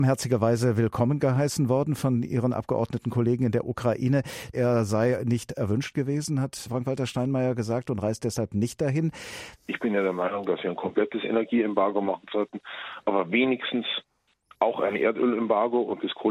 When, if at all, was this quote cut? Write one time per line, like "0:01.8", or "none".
0:04.5
0:09.5